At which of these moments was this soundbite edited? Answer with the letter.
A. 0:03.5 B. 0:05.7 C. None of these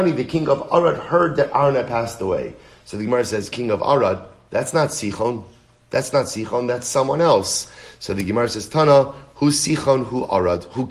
A